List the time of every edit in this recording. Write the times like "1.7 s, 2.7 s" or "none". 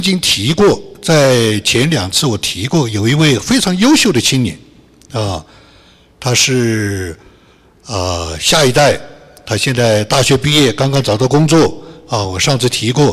none